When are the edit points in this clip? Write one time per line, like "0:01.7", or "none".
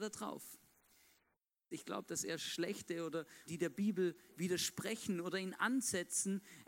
0:01.7
0:03.5